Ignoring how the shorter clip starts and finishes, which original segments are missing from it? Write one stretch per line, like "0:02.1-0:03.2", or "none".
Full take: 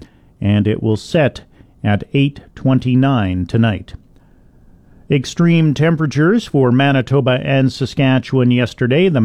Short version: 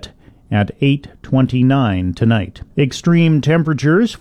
0:04.0-0:05.0

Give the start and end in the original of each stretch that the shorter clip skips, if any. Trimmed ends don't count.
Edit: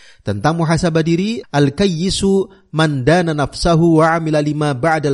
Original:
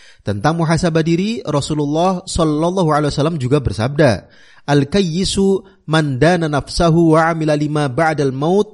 0:01.4-0:04.6

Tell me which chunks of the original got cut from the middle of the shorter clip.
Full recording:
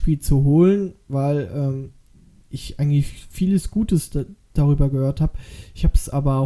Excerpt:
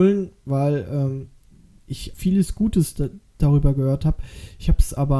0:02.8-0:03.3

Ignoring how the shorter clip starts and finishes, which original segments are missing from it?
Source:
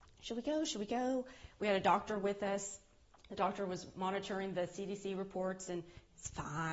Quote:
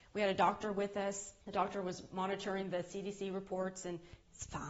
0:02.9-0:03.3

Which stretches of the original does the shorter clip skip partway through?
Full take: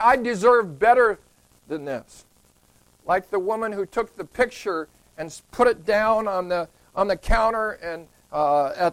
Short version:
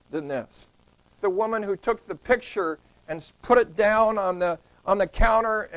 0:02.8-0:03.3

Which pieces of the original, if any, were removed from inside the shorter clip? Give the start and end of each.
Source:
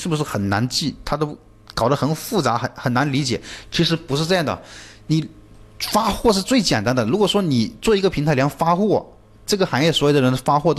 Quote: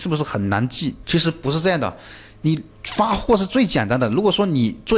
0:01.0-0:03.7
0:05.4-0:05.7

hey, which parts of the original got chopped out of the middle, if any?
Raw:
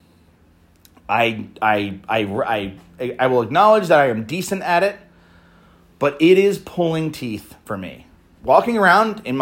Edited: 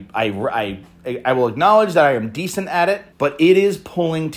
0:05.1-0:05.9

